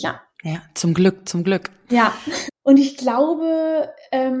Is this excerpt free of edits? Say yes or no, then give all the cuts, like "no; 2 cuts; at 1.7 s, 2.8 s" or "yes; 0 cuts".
no; 1 cut; at 2.5 s